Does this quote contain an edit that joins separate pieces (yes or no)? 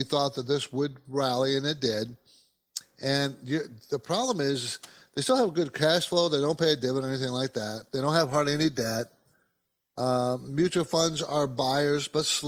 no